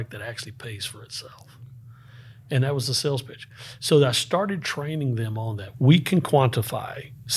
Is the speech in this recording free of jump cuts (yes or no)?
no